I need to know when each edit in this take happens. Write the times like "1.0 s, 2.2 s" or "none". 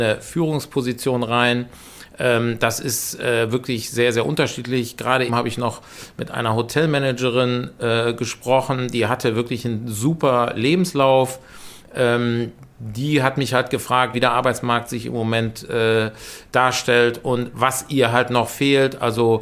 5.3 s, 14.1 s